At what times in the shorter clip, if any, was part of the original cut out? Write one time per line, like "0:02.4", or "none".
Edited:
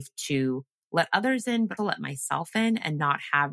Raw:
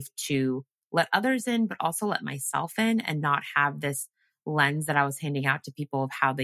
0:01.8